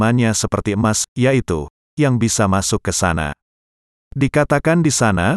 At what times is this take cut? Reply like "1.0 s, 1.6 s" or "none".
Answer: 1.9 s